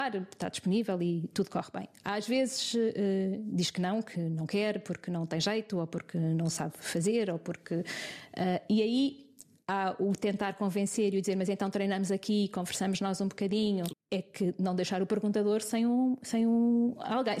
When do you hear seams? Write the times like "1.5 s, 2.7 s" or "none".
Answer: 13.9 s